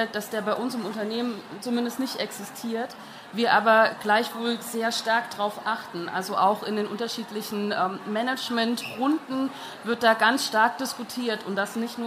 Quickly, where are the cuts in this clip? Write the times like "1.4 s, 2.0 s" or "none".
none